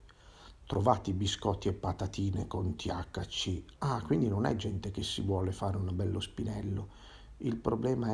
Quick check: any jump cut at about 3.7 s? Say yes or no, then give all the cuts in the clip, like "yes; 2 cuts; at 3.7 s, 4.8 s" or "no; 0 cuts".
yes; 1 cut; at 3.7 s